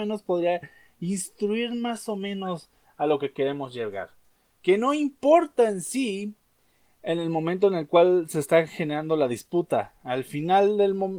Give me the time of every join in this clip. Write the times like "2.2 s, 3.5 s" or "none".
none